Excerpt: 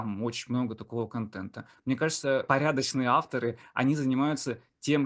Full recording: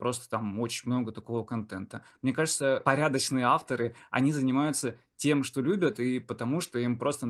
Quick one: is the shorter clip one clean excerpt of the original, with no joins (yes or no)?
yes